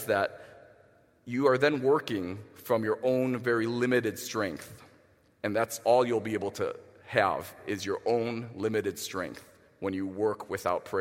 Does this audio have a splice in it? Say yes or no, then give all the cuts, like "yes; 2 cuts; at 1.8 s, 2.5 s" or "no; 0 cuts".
no; 0 cuts